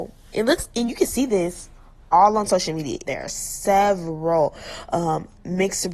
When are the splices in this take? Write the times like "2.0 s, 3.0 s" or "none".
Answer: 3.1 s